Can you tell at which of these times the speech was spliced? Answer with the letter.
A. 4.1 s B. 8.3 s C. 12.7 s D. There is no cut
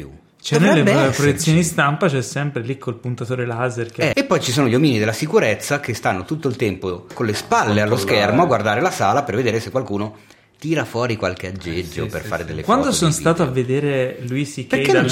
A